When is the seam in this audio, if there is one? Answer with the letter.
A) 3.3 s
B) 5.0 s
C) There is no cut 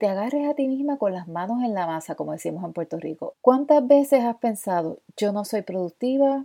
A